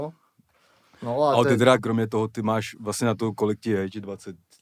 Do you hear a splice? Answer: yes; 1 cut; at 1.8 s

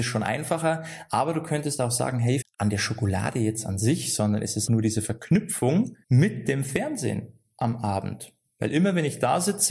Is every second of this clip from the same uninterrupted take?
no; 3 cuts; at 2.4 s, 4.7 s, 6.0 s

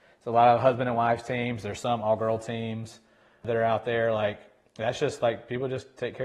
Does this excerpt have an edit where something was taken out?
no; 0 cuts

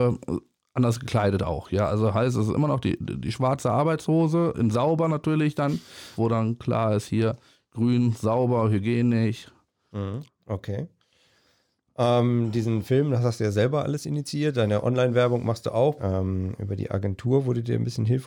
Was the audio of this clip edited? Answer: yes; 3 cuts; at 6.2 s, 10.3 s, 16.0 s

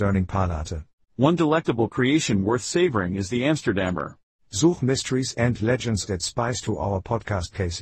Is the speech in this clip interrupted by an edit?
yes; 3 cuts; at 1.0 s, 4.4 s, 6.1 s

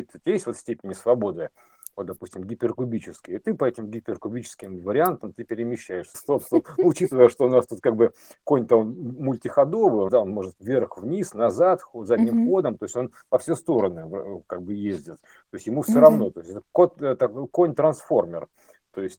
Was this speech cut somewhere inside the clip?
yes; 2 cuts; at 6.1 s, 10.1 s

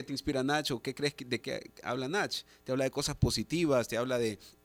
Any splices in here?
yes; 1 cut; at 1.4 s

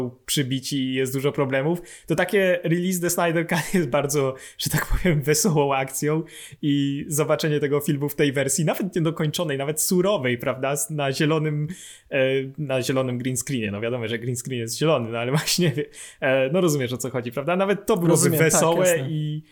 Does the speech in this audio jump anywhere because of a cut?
no; 0 cuts

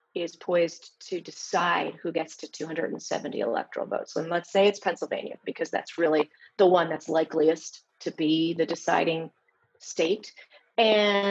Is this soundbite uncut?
yes; 0 cuts

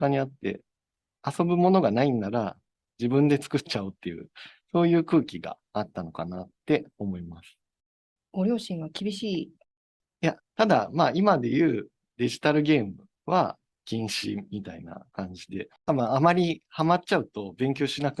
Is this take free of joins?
no; 2 cuts; at 10.4 s, 15.8 s

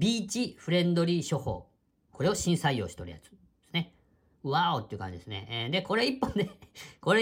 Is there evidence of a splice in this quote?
no; 0 cuts

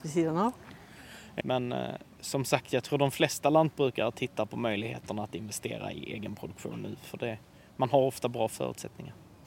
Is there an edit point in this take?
yes; 1 cut; at 1.4 s

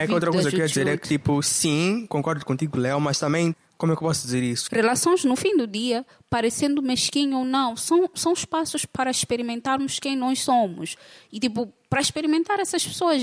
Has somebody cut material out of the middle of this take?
yes; 1 cut; at 4.7 s

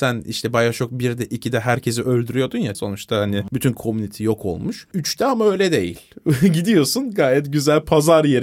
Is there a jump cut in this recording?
yes; 1 cut; at 2.7 s

